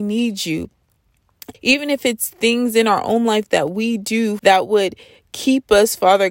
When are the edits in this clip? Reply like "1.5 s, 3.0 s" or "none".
1.5 s, 4.4 s